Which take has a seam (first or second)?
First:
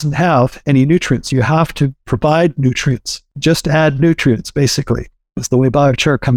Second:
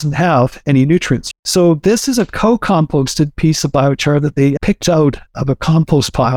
second